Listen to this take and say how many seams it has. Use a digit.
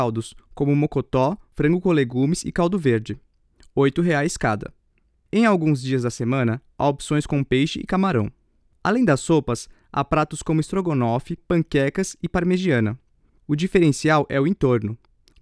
2